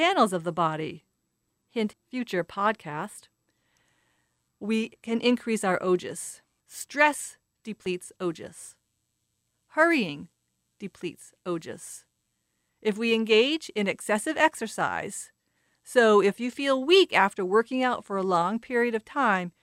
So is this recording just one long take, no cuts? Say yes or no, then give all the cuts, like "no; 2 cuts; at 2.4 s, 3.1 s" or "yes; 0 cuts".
no; 2 cuts; at 1.9 s, 6.6 s